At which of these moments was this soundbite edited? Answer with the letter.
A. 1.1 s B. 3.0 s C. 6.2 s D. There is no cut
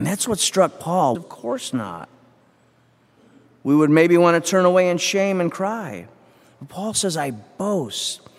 A